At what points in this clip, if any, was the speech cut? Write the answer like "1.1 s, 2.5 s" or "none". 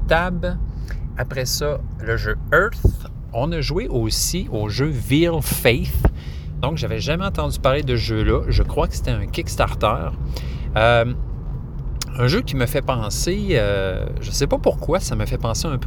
none

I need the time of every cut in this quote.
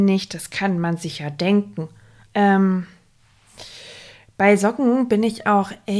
2.2 s

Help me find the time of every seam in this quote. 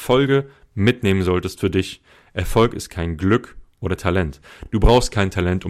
none

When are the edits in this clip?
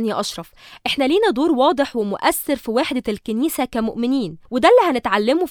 4.5 s

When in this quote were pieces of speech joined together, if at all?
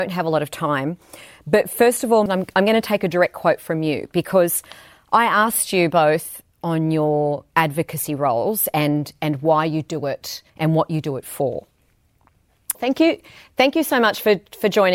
2.3 s, 10.5 s, 12.7 s

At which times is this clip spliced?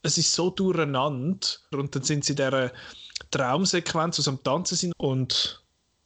1.7 s, 4.9 s

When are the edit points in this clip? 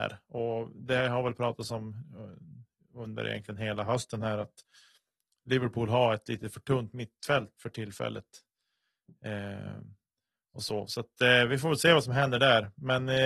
7.5 s

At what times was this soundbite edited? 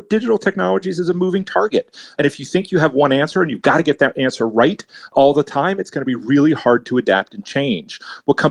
none

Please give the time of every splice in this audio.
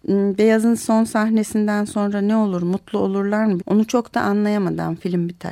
3.6 s

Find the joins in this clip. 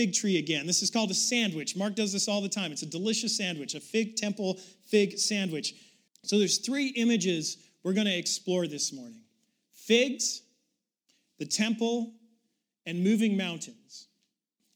6.1 s

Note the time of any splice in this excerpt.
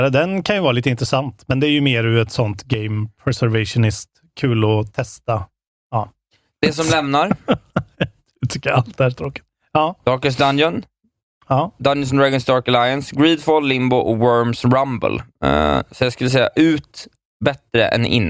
none

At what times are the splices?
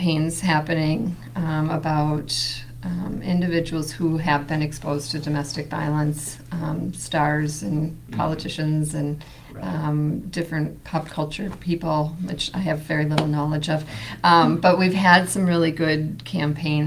none

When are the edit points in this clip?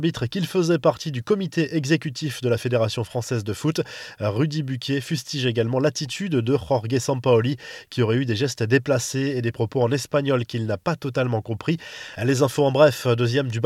none

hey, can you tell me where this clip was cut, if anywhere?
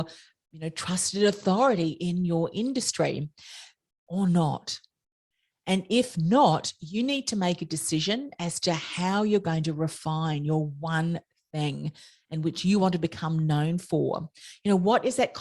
none

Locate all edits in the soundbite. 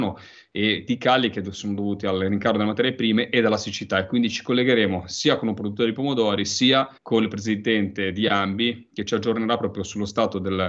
7.0 s

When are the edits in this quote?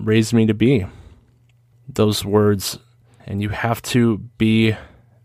1.7 s, 3.2 s

